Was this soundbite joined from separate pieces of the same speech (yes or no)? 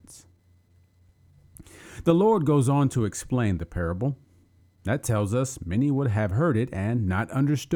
no